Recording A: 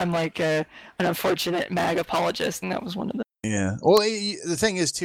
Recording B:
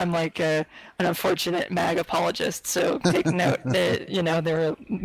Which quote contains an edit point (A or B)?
A